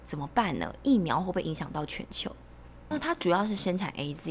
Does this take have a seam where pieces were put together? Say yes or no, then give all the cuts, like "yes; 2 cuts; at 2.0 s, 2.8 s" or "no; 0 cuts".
yes; 1 cut; at 2.9 s